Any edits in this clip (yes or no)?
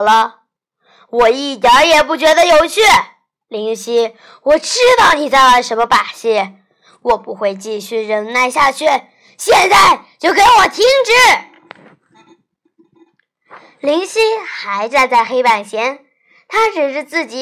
no